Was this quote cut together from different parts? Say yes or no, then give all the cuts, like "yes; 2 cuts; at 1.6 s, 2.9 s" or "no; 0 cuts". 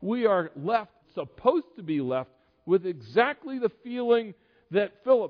yes; 1 cut; at 1.0 s